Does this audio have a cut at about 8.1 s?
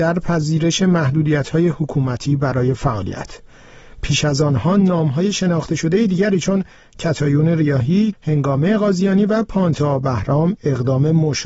yes; 1 cut; at 8.1 s

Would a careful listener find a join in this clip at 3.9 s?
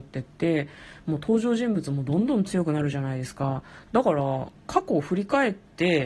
yes; 1 cut; at 3.9 s

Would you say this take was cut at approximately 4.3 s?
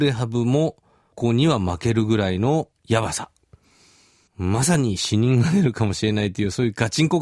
no; 1 cut; at 1.1 s

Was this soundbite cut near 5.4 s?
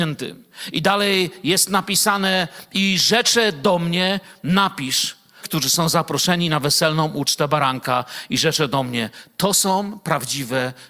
yes; 1 cut; at 5.4 s

